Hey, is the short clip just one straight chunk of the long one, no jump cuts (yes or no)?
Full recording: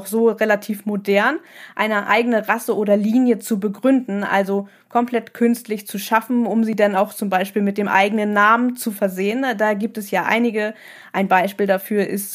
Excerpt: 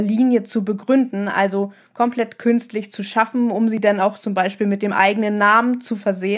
yes